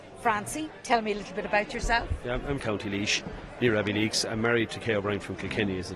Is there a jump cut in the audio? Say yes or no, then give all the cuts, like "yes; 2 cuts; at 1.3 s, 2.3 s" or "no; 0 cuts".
yes; 1 cut; at 2.6 s